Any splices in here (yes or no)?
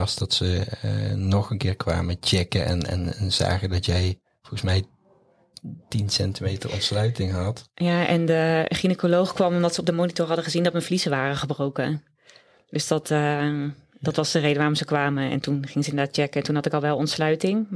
no